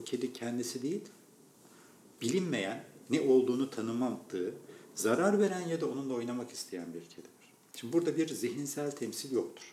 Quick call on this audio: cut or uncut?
uncut